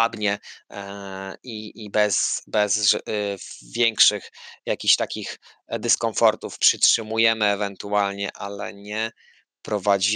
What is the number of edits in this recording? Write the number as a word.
one